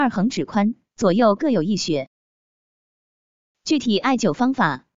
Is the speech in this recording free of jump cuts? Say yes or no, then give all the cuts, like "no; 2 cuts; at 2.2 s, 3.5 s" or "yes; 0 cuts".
yes; 0 cuts